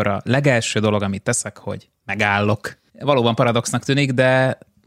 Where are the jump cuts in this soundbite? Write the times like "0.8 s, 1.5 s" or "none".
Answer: 2.9 s